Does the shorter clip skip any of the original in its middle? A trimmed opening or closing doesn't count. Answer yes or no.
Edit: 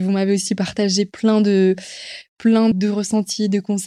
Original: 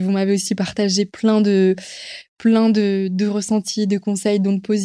yes